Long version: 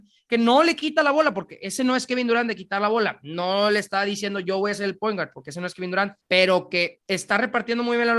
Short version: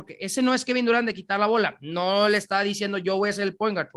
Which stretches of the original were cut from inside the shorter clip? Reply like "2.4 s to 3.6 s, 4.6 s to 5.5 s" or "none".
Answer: none